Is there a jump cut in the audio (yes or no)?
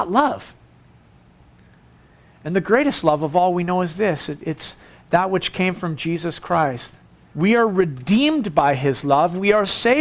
yes